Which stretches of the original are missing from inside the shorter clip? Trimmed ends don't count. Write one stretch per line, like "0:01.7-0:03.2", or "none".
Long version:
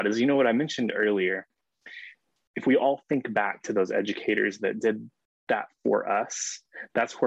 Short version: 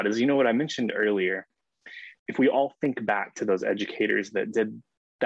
0:02.2-0:02.5